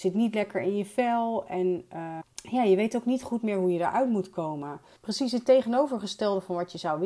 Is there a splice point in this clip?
yes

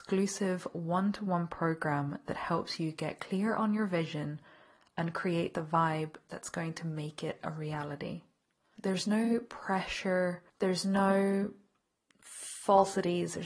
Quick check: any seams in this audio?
yes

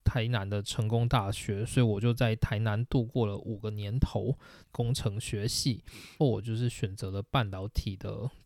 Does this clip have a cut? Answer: yes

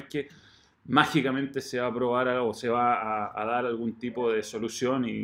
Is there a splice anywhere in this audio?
no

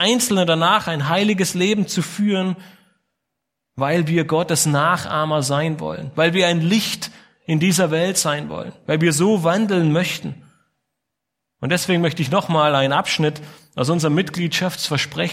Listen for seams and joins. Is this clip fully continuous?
yes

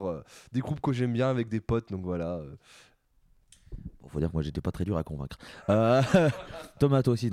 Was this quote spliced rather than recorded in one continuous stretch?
no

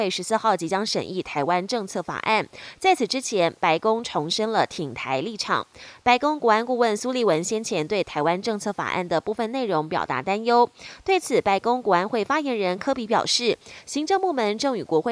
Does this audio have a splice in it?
no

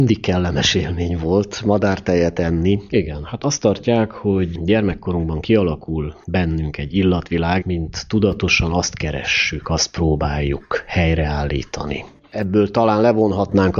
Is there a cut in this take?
yes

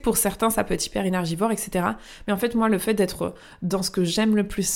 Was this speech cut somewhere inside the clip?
no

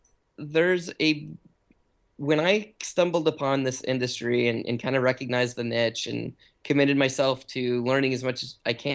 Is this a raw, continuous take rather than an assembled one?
yes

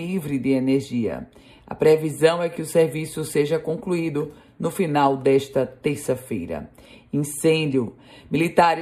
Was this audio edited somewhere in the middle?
no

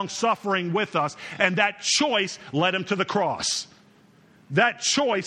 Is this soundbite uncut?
yes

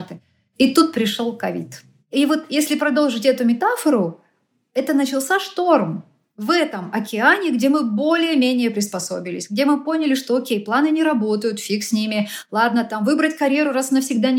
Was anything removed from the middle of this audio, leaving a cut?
no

